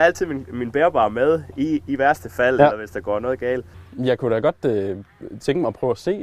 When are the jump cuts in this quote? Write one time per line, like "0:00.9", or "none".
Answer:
none